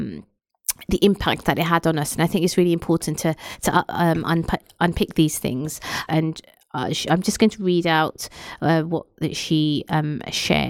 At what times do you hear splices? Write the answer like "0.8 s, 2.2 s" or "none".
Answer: 6.1 s